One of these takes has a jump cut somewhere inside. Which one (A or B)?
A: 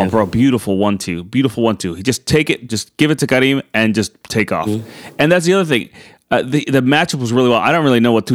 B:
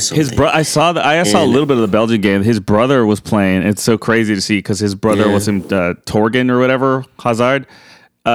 A